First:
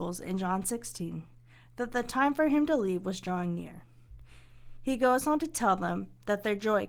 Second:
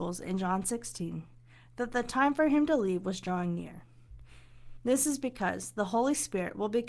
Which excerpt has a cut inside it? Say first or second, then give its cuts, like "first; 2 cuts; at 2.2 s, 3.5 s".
second; 1 cut; at 4.8 s